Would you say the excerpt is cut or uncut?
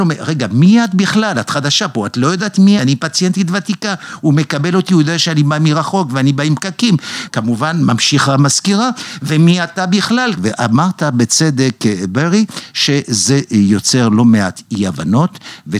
cut